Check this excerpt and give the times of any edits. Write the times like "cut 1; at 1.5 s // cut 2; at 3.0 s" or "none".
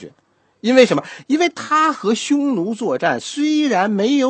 none

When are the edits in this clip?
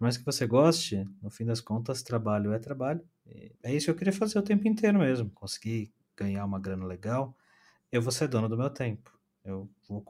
cut 1; at 3.5 s // cut 2; at 5.3 s

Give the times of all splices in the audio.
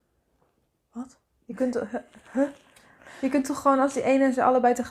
none

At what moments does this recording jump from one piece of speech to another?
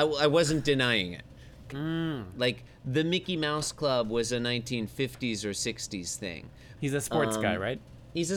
cut 1; at 1.7 s // cut 2; at 6.8 s

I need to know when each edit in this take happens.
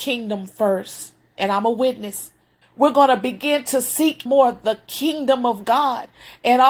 cut 1; at 2.6 s // cut 2; at 4.3 s

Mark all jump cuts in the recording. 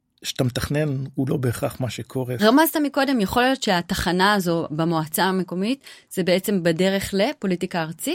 cut 1; at 2.4 s

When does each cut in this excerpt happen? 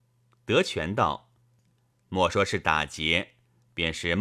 cut 1; at 1.9 s

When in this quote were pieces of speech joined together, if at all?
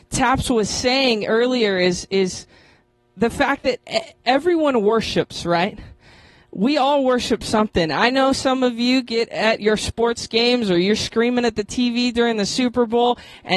none

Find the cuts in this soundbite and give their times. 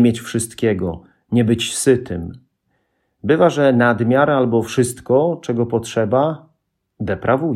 none

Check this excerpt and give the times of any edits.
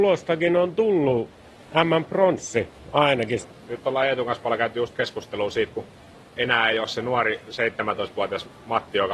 cut 1; at 3.4 s

